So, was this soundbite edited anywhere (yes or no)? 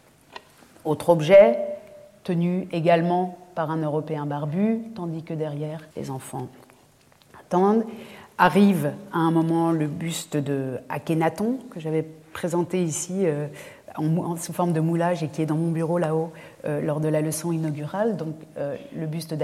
yes